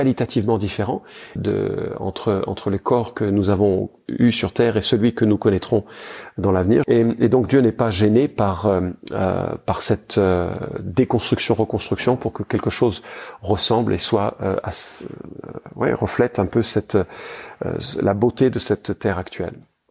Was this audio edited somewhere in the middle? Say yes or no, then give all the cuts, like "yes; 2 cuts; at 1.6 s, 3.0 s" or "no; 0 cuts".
yes; 2 cuts; at 1.4 s, 6.8 s